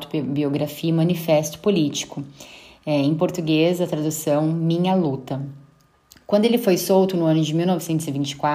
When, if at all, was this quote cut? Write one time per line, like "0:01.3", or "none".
none